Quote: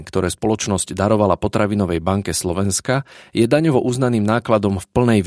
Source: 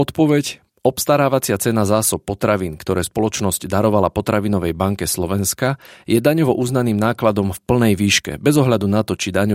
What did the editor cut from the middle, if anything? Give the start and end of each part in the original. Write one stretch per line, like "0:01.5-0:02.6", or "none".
none